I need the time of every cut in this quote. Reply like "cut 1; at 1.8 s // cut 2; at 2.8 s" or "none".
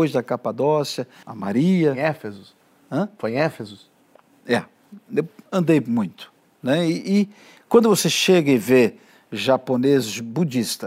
cut 1; at 1.2 s